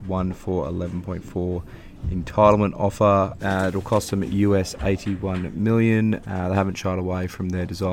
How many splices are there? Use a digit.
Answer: 2